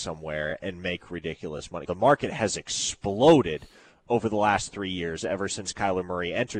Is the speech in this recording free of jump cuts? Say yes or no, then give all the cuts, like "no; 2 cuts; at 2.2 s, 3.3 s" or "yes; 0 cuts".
no; 1 cut; at 1.8 s